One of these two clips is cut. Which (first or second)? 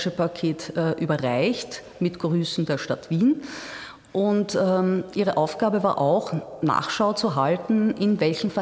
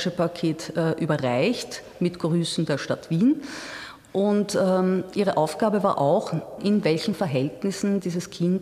second